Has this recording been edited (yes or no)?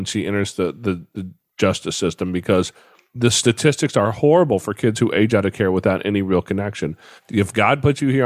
yes